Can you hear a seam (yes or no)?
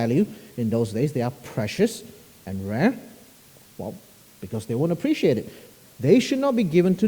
yes